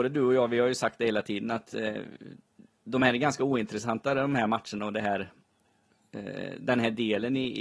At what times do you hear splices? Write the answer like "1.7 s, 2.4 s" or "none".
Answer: none

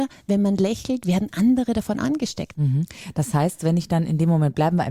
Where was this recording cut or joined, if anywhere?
2.5 s

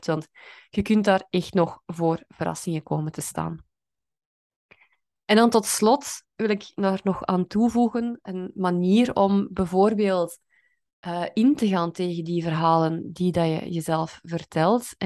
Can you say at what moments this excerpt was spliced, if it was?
none

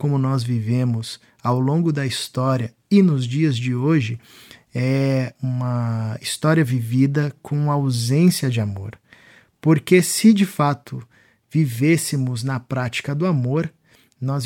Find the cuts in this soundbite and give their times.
5.4 s

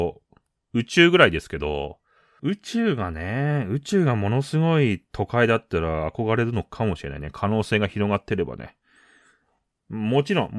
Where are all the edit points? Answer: 2.4 s

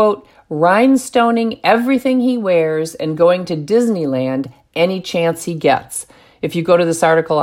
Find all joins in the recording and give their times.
none

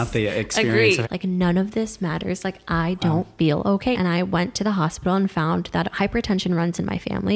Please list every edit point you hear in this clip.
1.0 s, 3.9 s

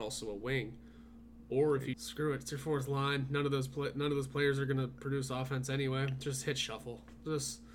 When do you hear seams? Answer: 1.9 s

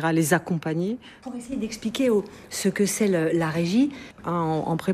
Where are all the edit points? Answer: 1.2 s, 2.5 s

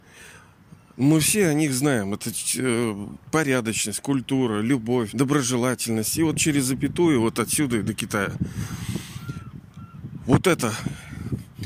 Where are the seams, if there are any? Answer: 5.1 s

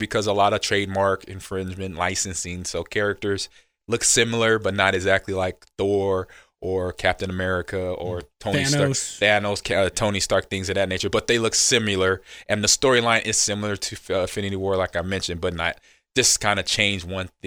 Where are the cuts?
none

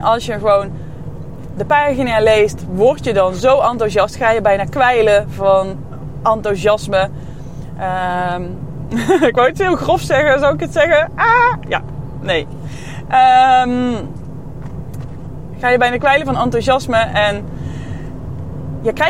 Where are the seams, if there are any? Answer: 1.6 s

